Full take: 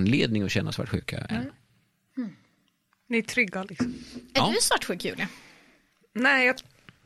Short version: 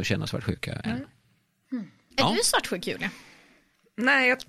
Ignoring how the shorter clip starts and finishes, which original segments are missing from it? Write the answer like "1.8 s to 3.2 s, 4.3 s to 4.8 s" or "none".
2.6 s to 4.3 s